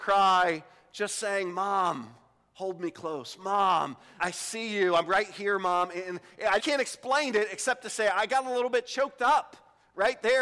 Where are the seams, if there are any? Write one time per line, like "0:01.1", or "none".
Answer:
0:04.2
0:06.6